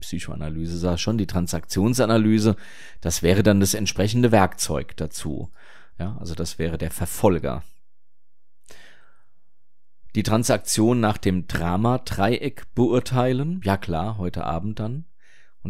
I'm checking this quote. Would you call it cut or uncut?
cut